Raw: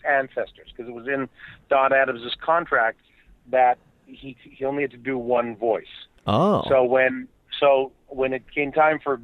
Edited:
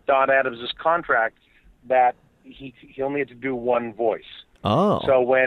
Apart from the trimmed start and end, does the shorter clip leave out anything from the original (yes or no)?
no